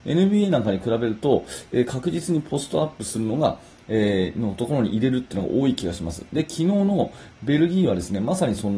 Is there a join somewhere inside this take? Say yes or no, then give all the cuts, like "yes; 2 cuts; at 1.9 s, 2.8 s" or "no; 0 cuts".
no; 0 cuts